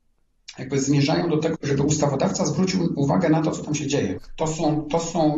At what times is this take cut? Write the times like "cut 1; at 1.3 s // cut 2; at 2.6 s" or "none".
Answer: cut 1; at 1.5 s // cut 2; at 4.2 s